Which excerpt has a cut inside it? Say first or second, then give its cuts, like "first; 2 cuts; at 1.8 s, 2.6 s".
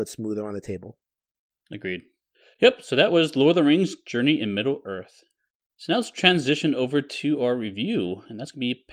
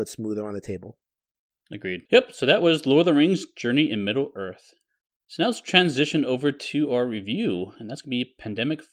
second; 1 cut; at 2.1 s